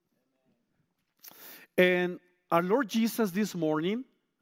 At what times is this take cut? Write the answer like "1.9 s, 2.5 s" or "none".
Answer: 2.5 s